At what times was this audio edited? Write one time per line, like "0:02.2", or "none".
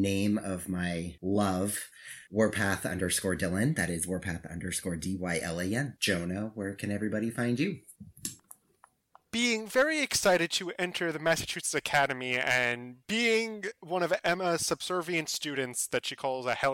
none